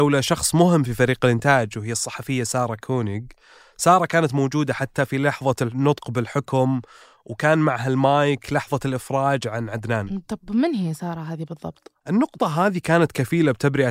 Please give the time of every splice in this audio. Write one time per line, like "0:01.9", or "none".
0:12.0